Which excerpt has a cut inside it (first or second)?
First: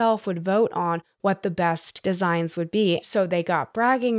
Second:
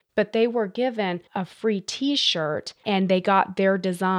first